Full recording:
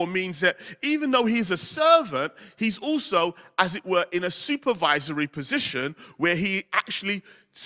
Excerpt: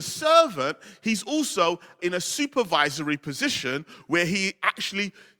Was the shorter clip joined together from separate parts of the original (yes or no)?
yes